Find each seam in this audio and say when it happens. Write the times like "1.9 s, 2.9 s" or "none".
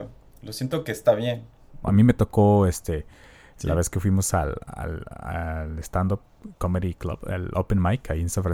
1.8 s